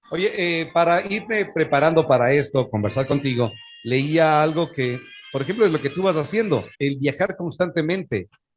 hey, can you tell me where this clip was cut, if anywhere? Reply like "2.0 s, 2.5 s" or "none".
6.7 s